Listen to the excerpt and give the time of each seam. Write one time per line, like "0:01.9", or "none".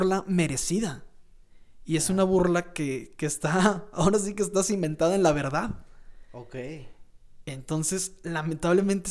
none